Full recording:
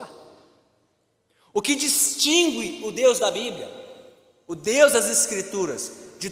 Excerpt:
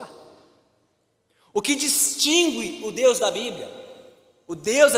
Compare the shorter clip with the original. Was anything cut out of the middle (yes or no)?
no